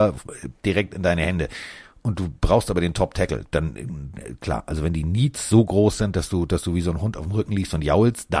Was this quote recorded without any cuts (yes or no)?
yes